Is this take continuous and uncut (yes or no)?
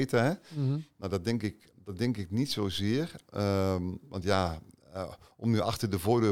yes